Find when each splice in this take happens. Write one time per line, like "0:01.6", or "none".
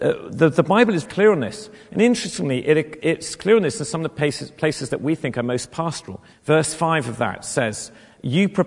0:01.1
0:06.3